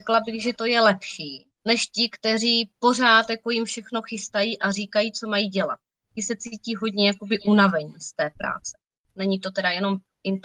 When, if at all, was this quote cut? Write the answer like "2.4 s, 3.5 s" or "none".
1.5 s, 9.1 s